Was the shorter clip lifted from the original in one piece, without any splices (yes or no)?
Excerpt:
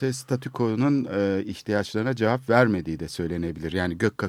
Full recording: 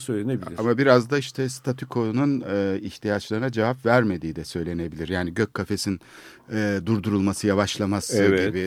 yes